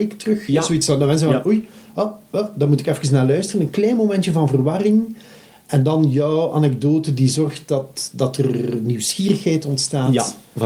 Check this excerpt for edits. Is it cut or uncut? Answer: uncut